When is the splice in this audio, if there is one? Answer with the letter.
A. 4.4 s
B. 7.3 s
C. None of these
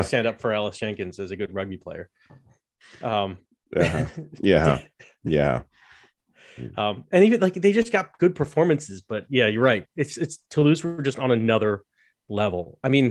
C